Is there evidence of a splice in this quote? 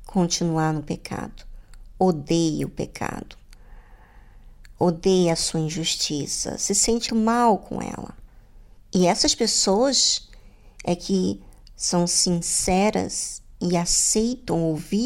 yes; 1 cut; at 7.1 s

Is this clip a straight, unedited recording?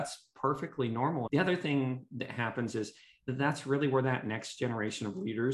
no; 1 cut; at 1.3 s

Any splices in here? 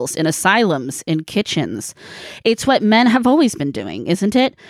no; 0 cuts

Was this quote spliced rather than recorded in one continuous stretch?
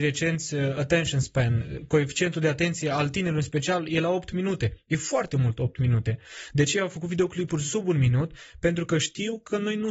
no; 0 cuts

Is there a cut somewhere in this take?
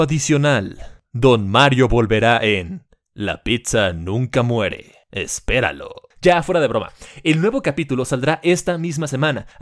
no; 0 cuts

